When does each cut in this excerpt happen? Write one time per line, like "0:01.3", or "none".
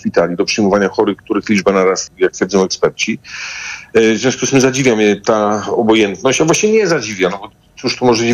0:02.1